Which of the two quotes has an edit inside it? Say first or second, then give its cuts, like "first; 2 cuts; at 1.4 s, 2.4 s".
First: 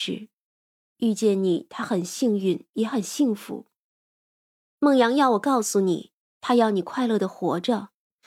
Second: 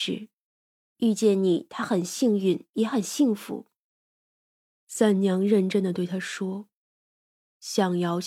first; 1 cut; at 4.7 s